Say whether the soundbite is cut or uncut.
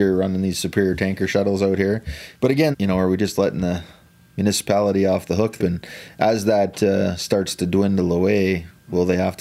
cut